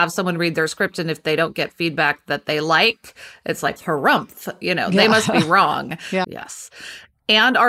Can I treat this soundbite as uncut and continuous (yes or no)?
no